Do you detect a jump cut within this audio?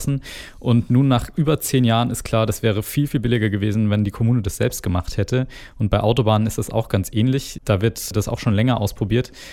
no; 0 cuts

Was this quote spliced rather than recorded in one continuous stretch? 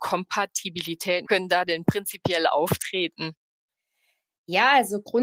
yes; 1 cut; at 1.3 s

